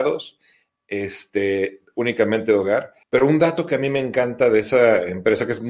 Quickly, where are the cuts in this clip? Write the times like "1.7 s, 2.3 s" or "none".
3.0 s